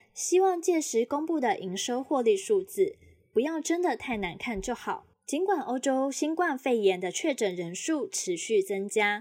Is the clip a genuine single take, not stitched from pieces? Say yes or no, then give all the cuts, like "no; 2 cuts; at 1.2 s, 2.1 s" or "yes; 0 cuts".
no; 1 cut; at 5.1 s